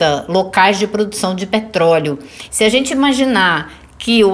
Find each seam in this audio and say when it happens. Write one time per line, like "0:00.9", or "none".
0:02.5